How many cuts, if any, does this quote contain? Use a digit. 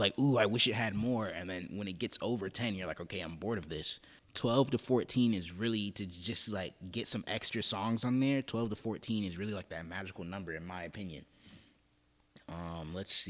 1